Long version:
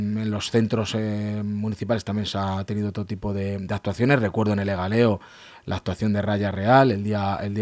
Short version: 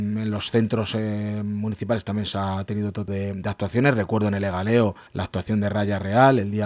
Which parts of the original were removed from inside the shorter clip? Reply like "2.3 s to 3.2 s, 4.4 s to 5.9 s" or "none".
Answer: 3.1 s to 3.3 s, 5.3 s to 5.6 s